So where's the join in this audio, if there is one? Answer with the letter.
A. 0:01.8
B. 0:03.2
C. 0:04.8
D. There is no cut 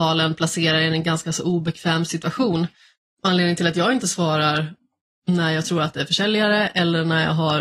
B